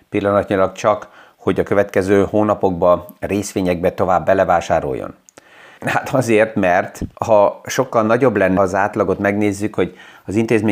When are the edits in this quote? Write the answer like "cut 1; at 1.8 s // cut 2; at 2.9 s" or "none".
cut 1; at 5.8 s // cut 2; at 7.1 s // cut 3; at 8.6 s